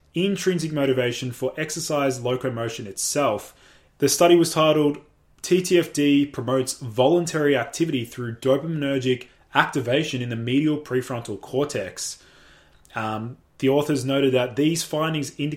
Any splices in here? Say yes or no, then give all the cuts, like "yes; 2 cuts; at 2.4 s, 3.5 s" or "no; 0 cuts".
yes; 1 cut; at 3.9 s